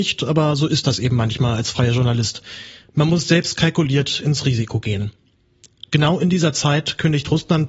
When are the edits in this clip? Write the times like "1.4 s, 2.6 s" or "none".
none